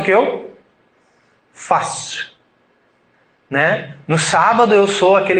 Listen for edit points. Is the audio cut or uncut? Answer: uncut